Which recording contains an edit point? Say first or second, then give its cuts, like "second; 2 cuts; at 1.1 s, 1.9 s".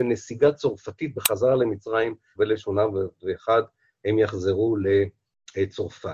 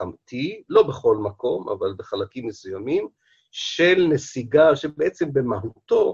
first; 1 cut; at 2.4 s